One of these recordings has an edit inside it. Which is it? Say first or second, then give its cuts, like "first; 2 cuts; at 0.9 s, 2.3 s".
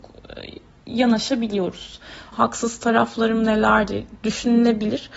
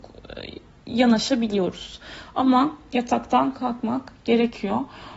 first; 1 cut; at 2.3 s